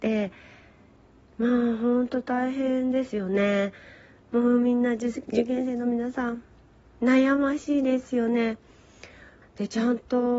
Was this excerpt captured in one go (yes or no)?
no